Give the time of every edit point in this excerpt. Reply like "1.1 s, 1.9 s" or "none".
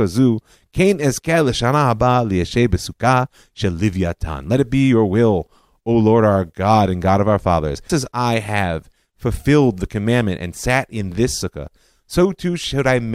7.9 s